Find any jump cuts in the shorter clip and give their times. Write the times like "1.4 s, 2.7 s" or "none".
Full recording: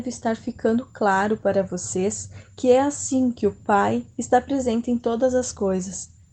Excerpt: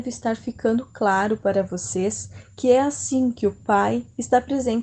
none